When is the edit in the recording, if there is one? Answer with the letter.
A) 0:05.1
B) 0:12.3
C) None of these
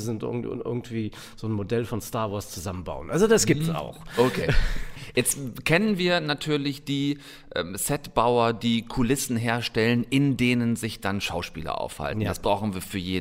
C